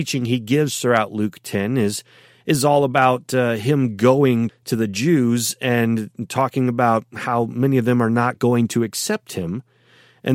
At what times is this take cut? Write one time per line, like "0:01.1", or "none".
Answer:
0:04.5